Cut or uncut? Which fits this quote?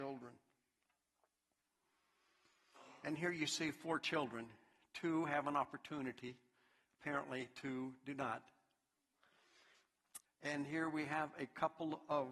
cut